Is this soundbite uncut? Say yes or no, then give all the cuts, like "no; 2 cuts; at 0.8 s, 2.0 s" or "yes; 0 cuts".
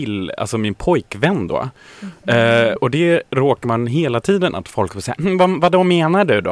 no; 2 cuts; at 2.8 s, 4.5 s